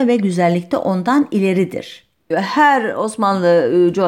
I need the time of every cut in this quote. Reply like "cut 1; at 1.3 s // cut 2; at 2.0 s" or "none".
cut 1; at 2.3 s